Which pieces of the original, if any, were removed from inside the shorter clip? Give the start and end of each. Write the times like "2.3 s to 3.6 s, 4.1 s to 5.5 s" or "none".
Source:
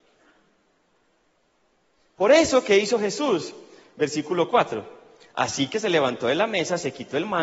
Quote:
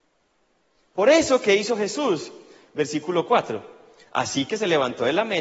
none